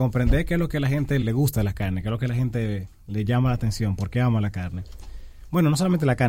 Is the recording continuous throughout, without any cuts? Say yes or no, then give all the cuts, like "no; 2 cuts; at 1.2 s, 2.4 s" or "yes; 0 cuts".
no; 1 cut; at 1.2 s